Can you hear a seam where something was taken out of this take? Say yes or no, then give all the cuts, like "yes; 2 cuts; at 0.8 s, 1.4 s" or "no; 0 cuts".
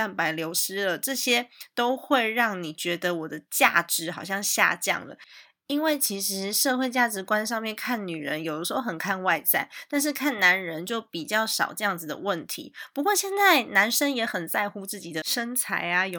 no; 0 cuts